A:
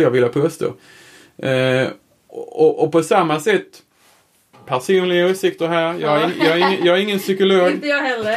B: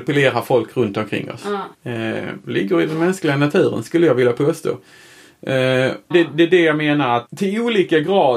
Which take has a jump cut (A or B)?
B